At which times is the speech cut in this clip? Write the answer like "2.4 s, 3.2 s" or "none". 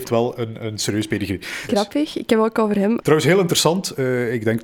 1.7 s, 3.0 s